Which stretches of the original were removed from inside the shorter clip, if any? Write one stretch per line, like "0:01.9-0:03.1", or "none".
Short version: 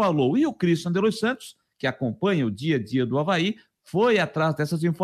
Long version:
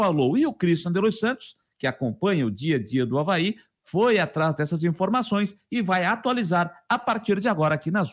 none